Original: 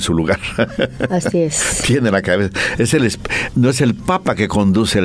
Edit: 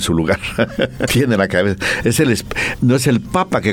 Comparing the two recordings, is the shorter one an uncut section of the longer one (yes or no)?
no